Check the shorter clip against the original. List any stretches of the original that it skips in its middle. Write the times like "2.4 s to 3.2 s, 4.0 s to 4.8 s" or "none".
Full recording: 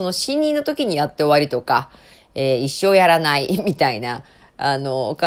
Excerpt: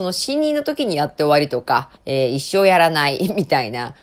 2.0 s to 2.2 s